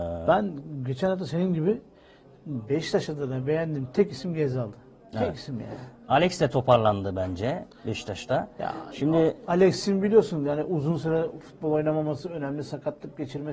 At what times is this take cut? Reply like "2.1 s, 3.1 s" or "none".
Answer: none